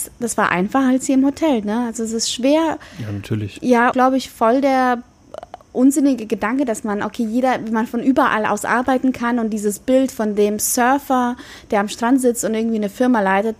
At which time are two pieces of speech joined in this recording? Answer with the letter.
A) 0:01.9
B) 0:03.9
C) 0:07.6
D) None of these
B